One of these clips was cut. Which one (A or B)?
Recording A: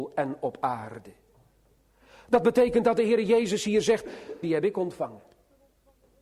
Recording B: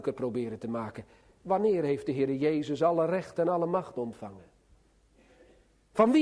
A